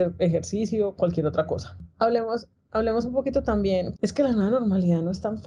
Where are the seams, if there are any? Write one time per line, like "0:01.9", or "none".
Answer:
0:04.0